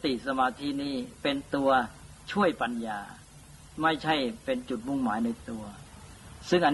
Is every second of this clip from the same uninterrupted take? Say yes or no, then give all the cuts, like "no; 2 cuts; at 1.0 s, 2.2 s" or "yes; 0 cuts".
yes; 0 cuts